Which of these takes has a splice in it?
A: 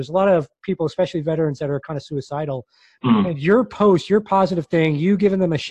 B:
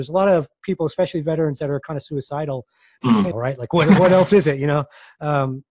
B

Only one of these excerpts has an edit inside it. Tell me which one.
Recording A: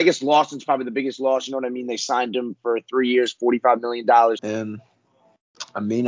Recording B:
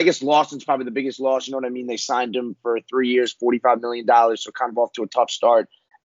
A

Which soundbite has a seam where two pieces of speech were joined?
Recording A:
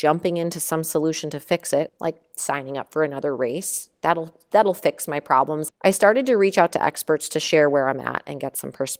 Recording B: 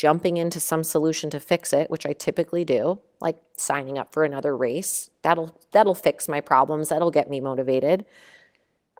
A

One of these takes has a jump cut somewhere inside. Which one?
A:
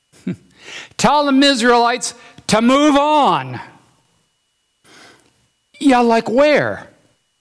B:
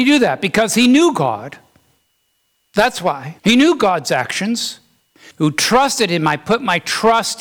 B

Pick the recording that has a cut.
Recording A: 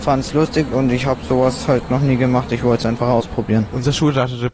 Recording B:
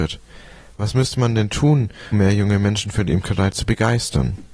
B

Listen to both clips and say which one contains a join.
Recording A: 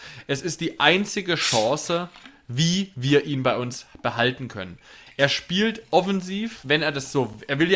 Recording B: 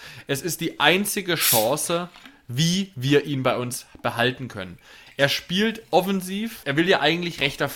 B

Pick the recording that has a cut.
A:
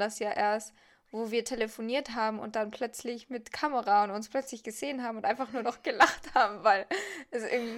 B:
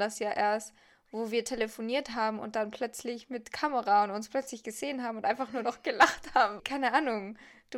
B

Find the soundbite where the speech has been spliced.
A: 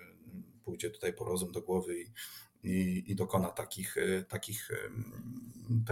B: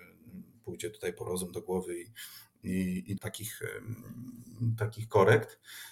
B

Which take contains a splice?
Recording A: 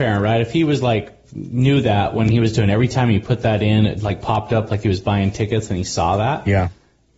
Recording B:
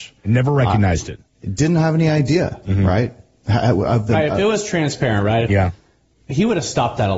B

